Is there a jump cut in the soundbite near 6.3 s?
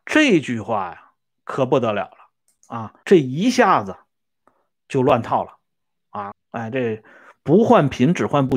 yes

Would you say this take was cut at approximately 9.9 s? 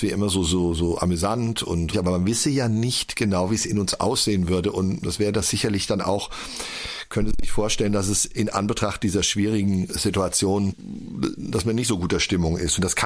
yes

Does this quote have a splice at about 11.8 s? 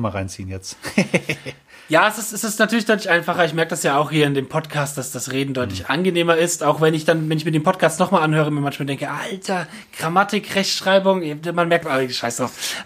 yes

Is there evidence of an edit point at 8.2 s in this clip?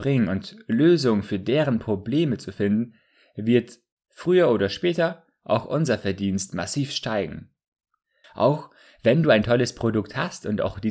yes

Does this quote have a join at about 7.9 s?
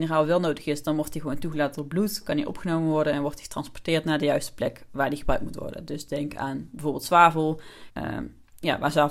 yes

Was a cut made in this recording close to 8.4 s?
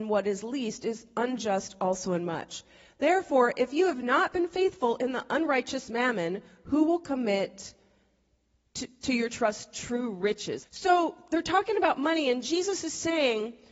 no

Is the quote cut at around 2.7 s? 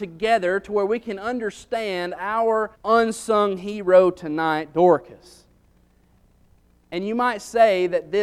yes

